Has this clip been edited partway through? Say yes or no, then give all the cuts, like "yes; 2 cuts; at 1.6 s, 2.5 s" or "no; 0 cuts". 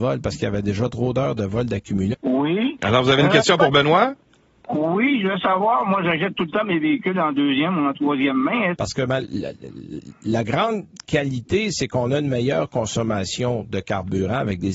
yes; 2 cuts; at 2.1 s, 8.7 s